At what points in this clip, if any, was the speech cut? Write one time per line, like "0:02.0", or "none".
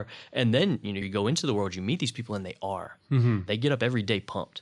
0:01.0
0:03.5